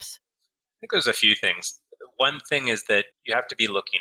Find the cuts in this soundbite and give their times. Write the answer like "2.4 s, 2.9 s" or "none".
3.1 s